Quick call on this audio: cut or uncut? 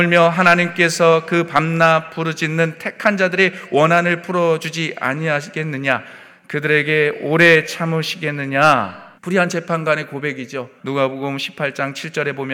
cut